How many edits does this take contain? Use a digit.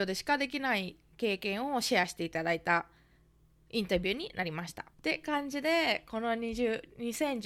1